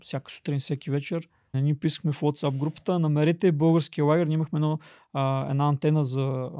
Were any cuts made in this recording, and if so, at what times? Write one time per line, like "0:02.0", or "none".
0:01.5